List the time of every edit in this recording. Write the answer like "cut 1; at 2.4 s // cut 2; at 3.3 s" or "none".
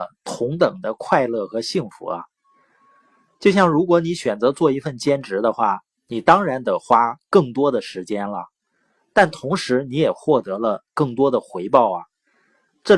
none